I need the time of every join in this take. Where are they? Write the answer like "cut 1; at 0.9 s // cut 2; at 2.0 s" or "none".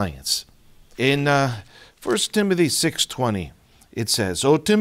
cut 1; at 0.9 s